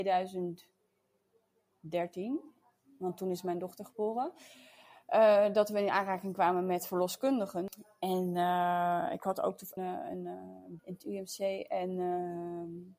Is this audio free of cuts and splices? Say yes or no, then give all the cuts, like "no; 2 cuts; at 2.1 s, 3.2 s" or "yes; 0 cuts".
no; 2 cuts; at 9.8 s, 10.8 s